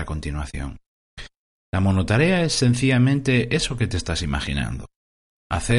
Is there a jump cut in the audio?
no; 0 cuts

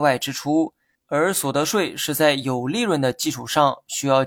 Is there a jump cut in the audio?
yes; 1 cut; at 0.9 s

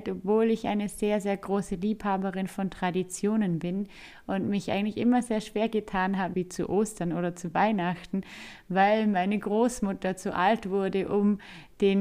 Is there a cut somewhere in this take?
yes; 1 cut; at 6.3 s

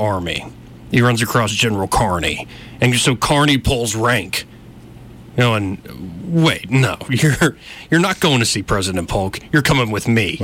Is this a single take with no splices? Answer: yes; 0 cuts

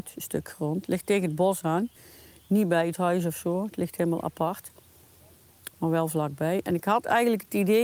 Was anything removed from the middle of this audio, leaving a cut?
no; 0 cuts

